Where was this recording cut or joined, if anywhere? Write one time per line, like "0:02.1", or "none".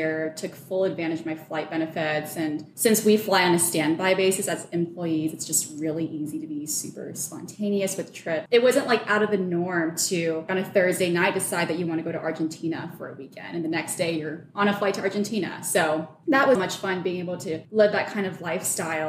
0:08.5
0:16.6

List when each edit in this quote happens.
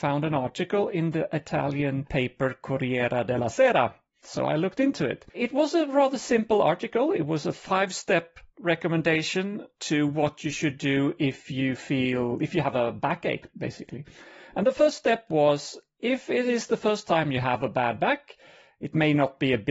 0:04.2
0:05.3

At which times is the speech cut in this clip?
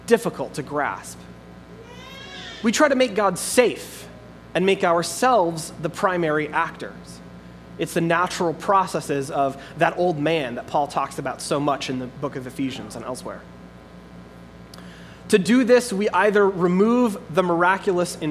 none

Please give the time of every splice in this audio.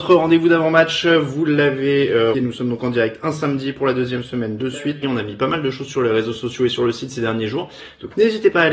0:02.3
0:05.0

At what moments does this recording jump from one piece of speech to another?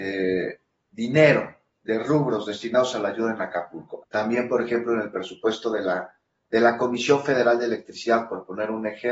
0:04.0

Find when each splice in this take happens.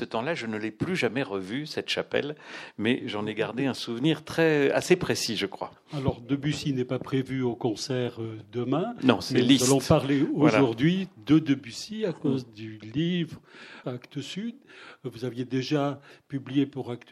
0:13.8

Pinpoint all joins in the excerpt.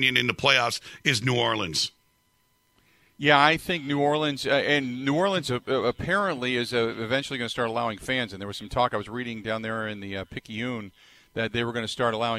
none

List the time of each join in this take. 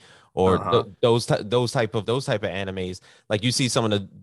0:02.0

